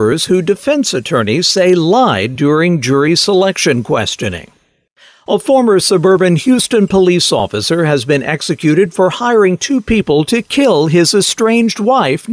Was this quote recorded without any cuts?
yes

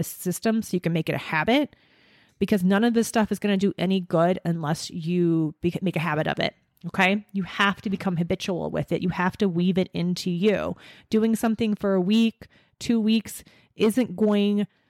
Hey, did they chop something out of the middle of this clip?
no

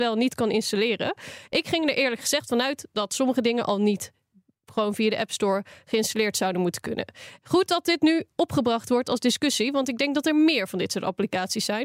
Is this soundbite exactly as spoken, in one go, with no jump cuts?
yes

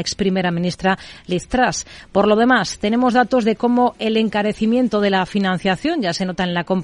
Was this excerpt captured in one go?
yes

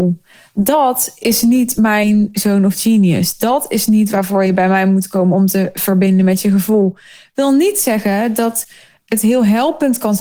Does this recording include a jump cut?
no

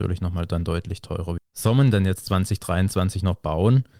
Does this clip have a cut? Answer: yes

